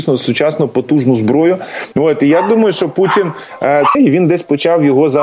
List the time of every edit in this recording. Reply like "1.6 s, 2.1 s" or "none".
1.9 s, 3.9 s